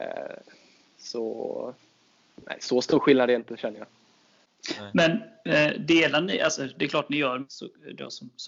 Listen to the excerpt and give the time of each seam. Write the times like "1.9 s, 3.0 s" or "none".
7.5 s